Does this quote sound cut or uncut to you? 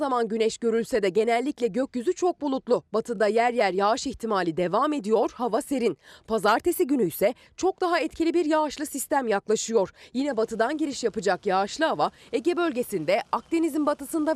uncut